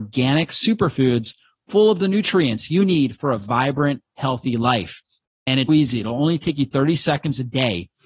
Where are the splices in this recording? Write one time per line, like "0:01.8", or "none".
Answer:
0:05.7